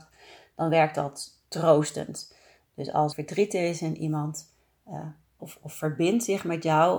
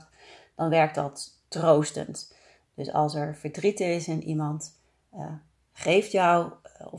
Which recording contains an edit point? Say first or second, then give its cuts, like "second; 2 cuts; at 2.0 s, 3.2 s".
first; 2 cuts; at 3.1 s, 5.4 s